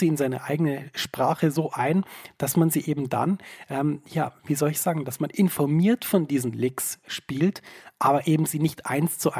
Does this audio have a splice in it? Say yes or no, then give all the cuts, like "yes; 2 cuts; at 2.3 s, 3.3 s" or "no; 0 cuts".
no; 0 cuts